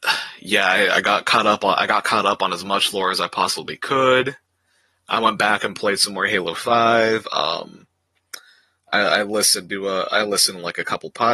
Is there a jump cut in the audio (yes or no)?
no